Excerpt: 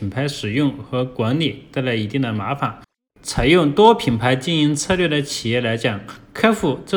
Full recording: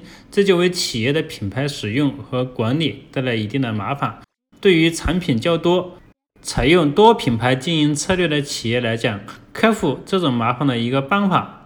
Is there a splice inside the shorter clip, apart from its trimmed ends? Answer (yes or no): yes